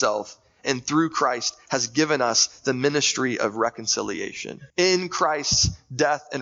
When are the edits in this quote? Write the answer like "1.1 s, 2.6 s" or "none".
4.7 s

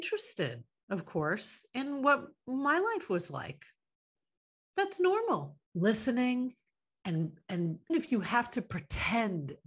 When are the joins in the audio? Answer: 5.6 s, 7.9 s

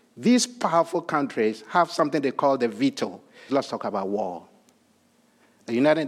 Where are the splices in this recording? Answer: 3.5 s

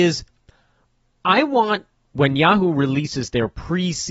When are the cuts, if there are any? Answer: none

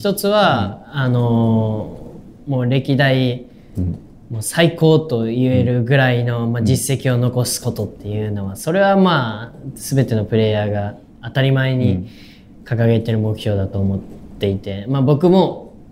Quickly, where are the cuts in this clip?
none

